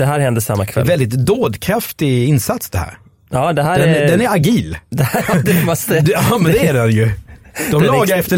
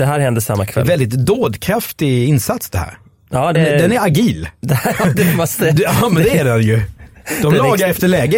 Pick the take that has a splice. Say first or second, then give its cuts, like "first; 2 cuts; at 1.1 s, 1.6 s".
second; 1 cut; at 3.5 s